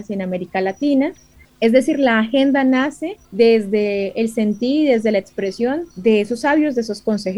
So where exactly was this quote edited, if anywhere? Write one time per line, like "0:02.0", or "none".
0:01.4
0:03.2
0:05.9